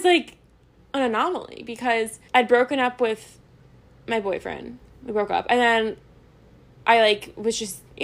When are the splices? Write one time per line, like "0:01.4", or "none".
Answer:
0:02.3